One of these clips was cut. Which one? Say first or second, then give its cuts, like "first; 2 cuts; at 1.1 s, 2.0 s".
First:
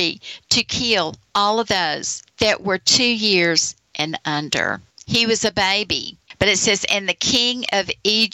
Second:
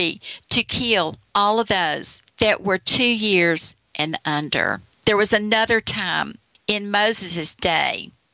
first; 1 cut; at 4.9 s